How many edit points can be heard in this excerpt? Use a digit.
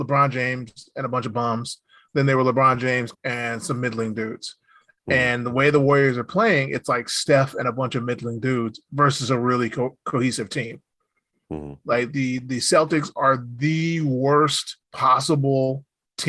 3